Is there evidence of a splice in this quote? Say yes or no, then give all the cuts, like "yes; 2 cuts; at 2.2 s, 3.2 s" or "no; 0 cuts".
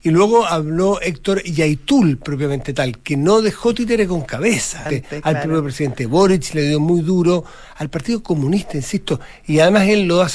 yes; 1 cut; at 4.9 s